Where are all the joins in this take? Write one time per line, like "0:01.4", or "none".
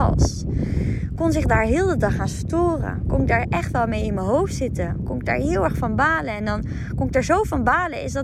none